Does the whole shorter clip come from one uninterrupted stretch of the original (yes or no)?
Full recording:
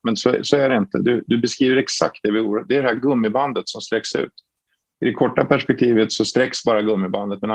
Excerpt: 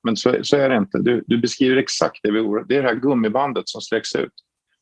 yes